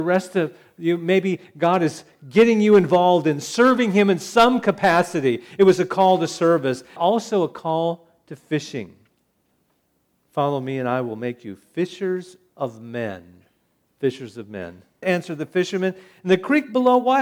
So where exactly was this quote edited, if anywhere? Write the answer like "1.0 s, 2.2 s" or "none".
7.0 s, 15.0 s